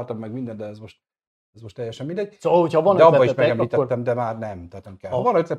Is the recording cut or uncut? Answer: uncut